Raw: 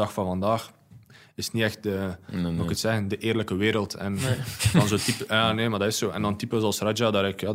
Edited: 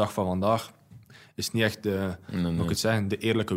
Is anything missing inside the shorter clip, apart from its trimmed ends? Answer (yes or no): no